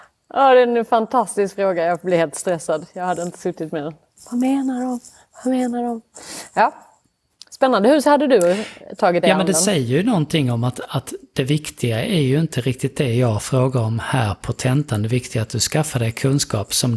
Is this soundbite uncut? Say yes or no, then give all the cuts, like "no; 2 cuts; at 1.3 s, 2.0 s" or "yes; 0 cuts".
yes; 0 cuts